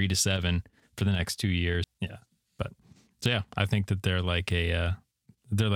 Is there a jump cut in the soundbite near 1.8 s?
yes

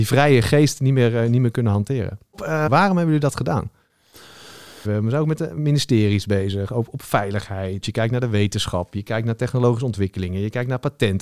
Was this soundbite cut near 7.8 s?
yes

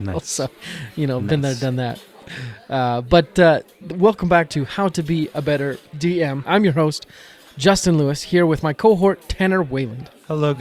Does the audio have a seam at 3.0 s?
no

